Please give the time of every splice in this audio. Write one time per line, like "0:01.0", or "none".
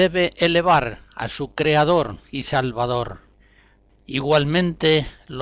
0:04.0